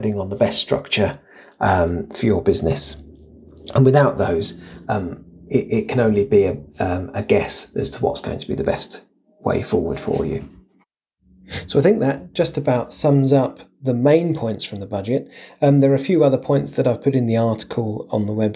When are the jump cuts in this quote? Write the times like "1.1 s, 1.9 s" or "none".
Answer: none

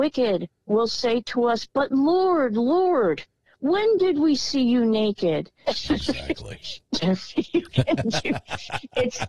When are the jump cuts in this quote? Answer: 5.6 s, 6.8 s

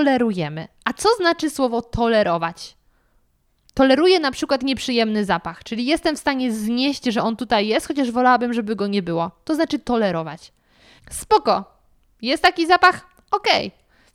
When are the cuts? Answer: 11.0 s

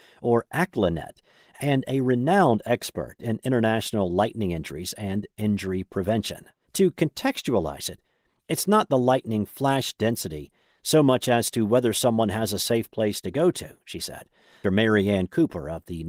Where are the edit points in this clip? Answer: 6.6 s, 14.6 s

